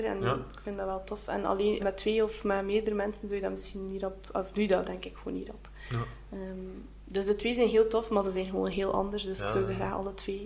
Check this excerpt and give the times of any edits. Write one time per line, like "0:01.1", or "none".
0:01.8